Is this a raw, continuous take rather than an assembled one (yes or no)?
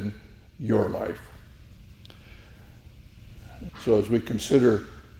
no